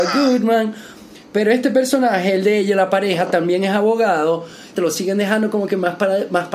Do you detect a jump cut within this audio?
yes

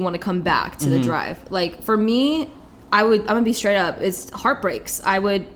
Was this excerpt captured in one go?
yes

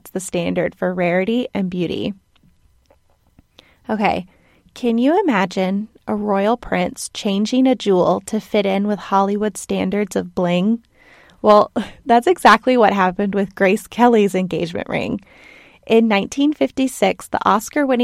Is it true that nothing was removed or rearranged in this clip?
yes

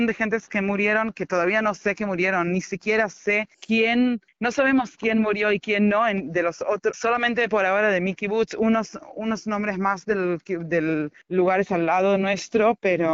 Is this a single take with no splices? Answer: no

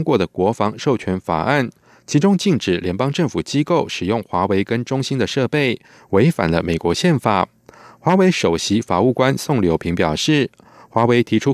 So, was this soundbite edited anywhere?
no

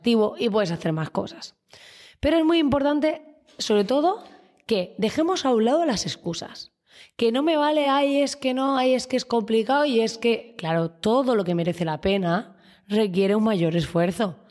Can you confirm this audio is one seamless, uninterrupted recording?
yes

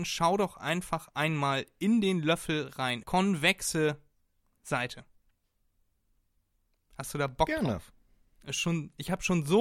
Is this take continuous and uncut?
no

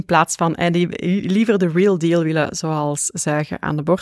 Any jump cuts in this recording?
no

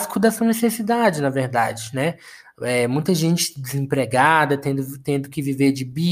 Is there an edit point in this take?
no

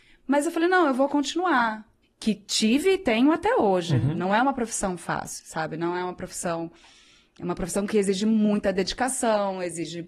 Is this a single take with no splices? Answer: no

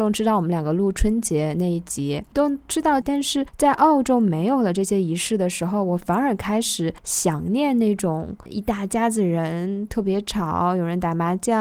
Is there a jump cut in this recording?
yes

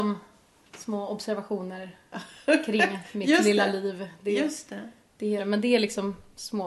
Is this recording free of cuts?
no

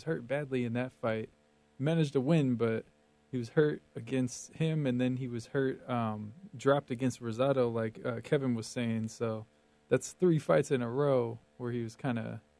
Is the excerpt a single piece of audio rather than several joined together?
yes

